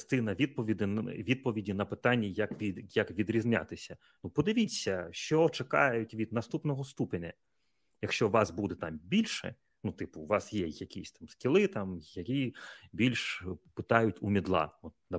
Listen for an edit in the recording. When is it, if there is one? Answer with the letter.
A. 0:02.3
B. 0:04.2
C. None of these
C